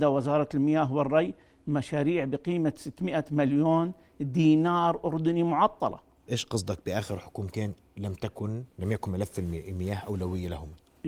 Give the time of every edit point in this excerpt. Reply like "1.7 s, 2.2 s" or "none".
6.3 s, 8.7 s